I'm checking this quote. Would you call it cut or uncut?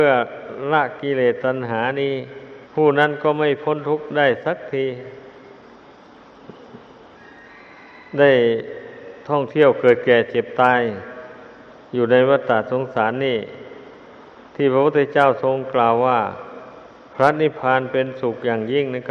cut